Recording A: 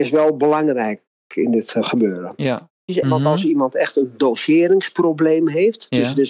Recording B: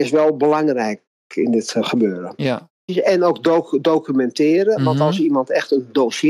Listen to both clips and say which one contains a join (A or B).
A